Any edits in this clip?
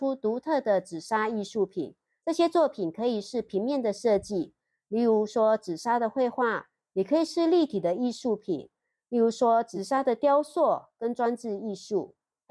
no; 0 cuts

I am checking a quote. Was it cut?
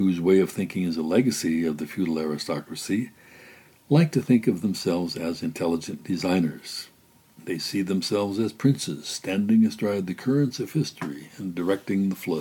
no; 0 cuts

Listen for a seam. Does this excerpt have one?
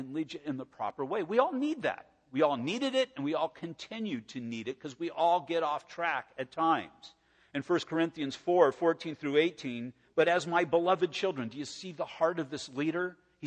yes; 1 cut; at 10.0 s

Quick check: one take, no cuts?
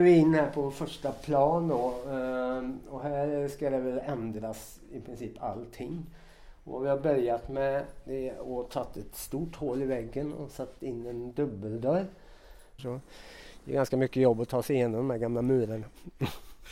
no; 1 cut; at 12.8 s

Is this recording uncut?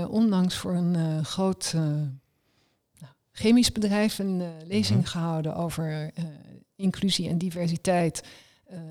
yes; 0 cuts

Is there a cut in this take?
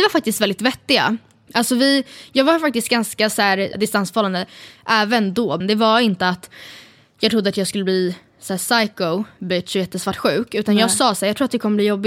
yes; 3 cuts; at 1.5 s, 3.7 s, 5.6 s

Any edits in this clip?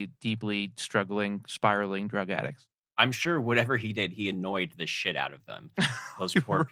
no; 0 cuts

